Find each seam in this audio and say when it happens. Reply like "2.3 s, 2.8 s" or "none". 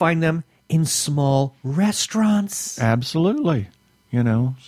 none